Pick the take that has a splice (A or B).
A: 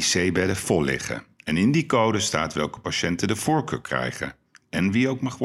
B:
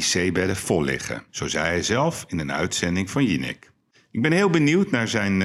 B